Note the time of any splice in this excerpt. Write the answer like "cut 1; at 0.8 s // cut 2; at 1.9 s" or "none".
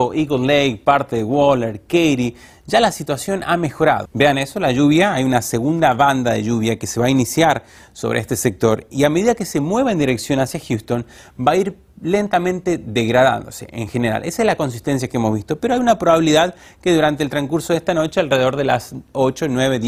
cut 1; at 4.1 s

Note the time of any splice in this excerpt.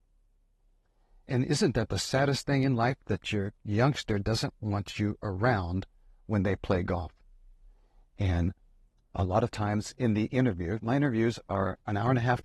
cut 1; at 8.0 s

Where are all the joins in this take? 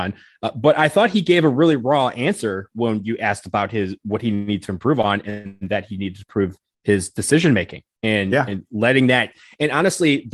none

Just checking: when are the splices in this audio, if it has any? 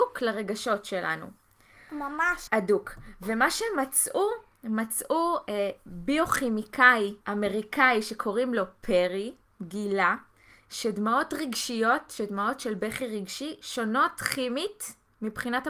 cut 1; at 2.5 s // cut 2; at 7.2 s

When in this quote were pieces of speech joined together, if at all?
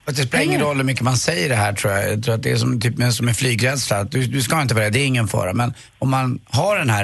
none

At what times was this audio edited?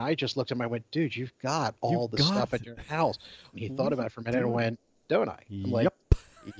cut 1; at 3.5 s // cut 2; at 5.1 s

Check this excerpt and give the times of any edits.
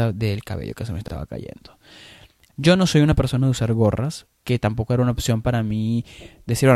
cut 1; at 2.5 s // cut 2; at 4.4 s

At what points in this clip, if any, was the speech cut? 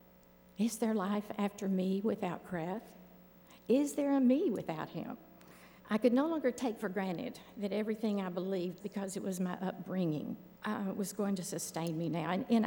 cut 1; at 5.8 s // cut 2; at 8.8 s // cut 3; at 10.5 s

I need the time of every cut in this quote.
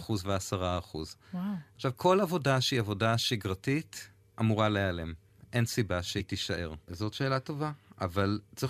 cut 1; at 6.9 s

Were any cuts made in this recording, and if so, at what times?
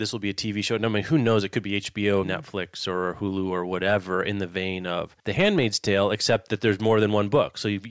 cut 1; at 2.2 s // cut 2; at 5.2 s

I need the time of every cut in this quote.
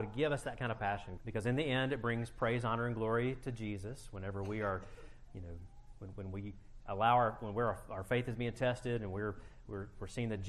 cut 1; at 1.2 s

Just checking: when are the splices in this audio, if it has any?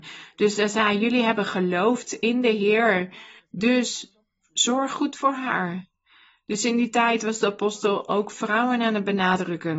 cut 1; at 3.4 s

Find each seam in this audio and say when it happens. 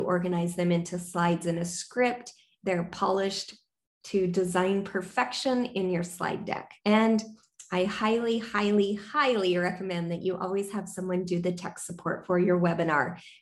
cut 1; at 6.8 s

